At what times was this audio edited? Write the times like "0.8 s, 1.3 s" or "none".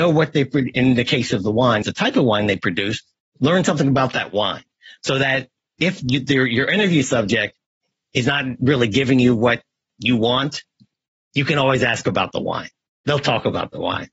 1.8 s